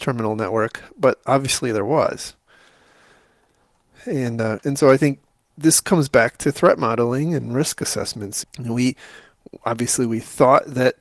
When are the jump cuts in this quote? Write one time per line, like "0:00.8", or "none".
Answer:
0:08.4